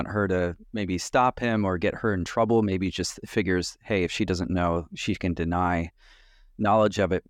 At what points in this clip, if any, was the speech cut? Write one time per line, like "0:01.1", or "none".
none